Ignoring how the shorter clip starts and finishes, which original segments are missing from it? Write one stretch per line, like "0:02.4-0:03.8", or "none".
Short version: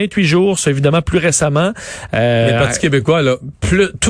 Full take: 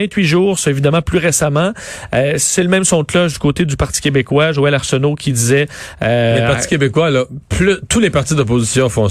0:02.1-0:06.0